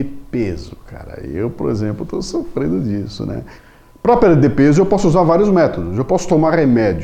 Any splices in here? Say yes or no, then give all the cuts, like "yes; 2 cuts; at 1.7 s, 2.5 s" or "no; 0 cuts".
no; 0 cuts